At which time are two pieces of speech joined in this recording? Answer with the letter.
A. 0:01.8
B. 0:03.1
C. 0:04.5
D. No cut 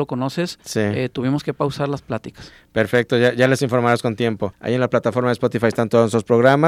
C